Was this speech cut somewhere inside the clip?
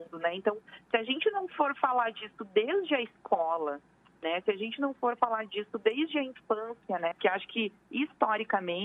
yes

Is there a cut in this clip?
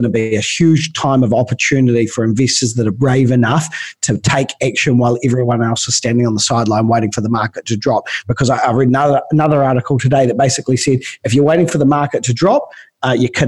no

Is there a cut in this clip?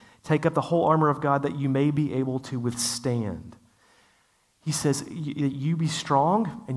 no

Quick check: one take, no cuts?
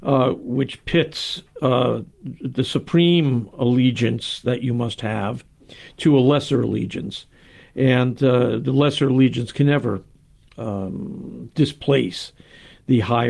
yes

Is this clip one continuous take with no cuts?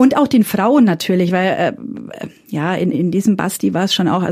no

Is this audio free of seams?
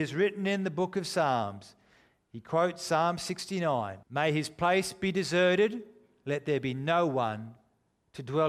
no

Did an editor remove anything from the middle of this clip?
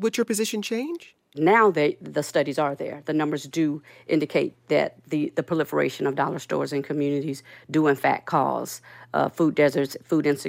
yes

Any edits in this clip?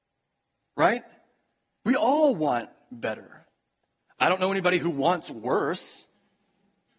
no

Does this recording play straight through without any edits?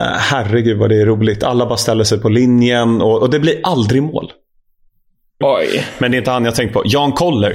no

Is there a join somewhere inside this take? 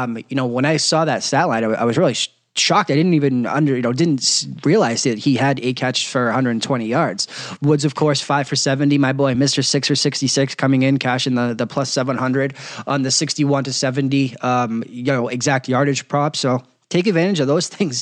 no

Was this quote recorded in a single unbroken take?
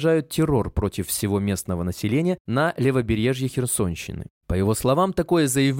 no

